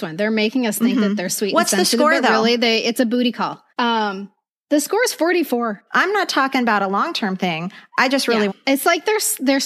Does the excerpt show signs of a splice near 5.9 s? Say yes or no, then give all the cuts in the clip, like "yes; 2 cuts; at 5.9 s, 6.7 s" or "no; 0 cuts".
yes; 3 cuts; at 3.7 s, 5.9 s, 8.5 s